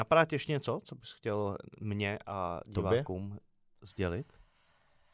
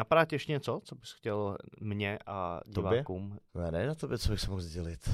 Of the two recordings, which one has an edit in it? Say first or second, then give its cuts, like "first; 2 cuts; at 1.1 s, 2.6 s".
second; 1 cut; at 3.5 s